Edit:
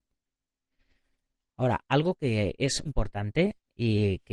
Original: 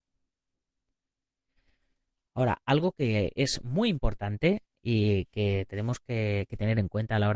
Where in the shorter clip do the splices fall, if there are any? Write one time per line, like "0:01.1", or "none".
0:02.8